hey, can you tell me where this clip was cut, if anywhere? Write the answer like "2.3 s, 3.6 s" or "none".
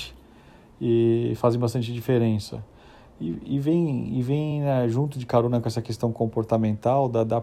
none